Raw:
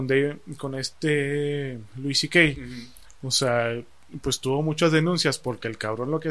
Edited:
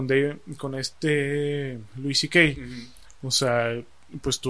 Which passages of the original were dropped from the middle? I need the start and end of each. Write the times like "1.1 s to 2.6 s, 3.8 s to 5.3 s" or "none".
none